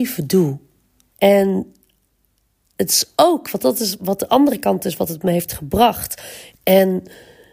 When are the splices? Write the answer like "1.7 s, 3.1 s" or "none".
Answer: 1.1 s, 6.5 s